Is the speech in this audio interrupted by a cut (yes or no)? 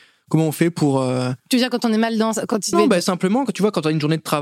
yes